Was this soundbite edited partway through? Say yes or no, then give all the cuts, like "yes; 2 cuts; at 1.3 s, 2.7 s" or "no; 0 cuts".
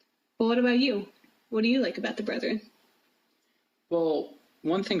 no; 0 cuts